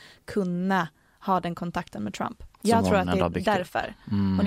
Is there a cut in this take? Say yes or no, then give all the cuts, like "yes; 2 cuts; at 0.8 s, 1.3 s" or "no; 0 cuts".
no; 0 cuts